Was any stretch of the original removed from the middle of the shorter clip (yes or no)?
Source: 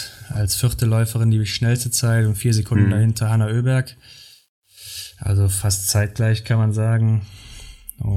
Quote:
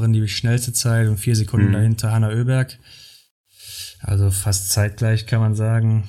no